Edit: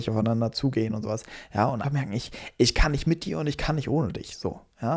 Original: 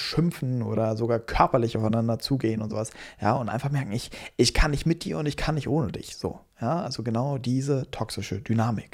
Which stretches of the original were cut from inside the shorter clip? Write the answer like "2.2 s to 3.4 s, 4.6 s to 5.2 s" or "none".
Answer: 3.5 s to 3.6 s